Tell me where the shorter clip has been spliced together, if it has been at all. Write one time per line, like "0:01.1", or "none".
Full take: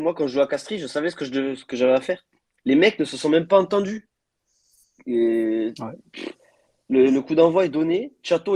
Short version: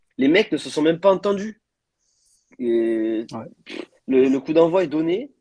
0:04.0